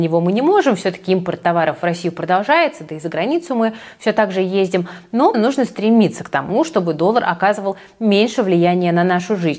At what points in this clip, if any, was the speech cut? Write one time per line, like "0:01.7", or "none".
0:05.3